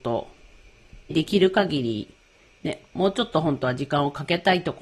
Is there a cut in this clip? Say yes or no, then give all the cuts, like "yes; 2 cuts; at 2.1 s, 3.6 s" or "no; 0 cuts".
yes; 1 cut; at 1.1 s